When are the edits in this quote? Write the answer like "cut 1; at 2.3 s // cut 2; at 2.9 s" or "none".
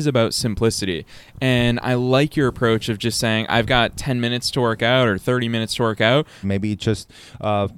cut 1; at 3.5 s // cut 2; at 6.4 s